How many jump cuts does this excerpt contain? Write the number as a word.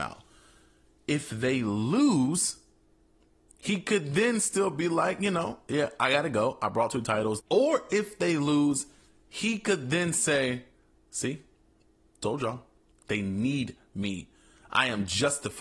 one